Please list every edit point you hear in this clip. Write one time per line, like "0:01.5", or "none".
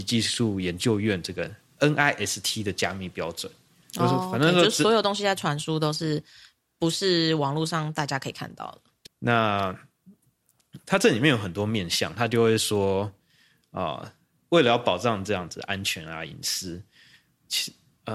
0:09.1